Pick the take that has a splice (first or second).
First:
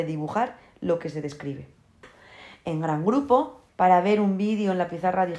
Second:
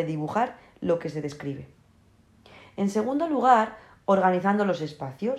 first